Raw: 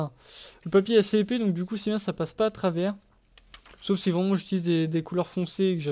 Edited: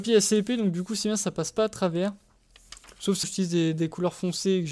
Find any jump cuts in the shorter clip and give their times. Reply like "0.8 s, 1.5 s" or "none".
3.2 s